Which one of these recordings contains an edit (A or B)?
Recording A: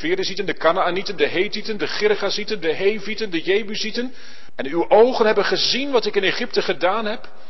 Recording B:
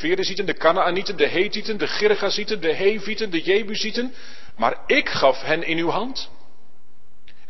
A